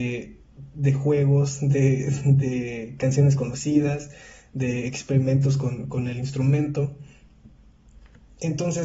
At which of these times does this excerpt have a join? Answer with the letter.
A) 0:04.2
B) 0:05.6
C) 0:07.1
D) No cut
D